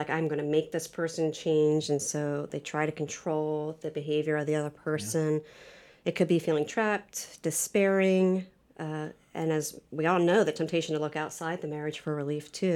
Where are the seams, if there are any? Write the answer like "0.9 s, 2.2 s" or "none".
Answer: none